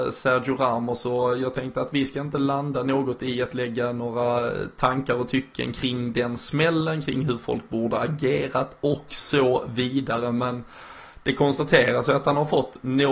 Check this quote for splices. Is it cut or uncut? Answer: uncut